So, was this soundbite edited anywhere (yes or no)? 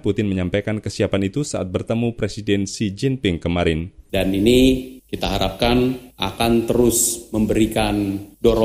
yes